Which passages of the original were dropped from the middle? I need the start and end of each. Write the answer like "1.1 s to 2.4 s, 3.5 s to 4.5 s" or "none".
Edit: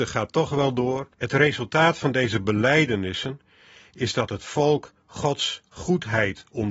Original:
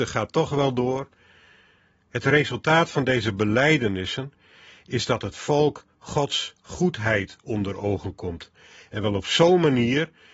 1.1 s to 2.1 s